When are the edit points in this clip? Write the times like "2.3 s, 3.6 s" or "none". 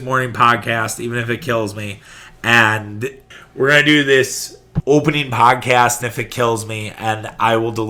6.0 s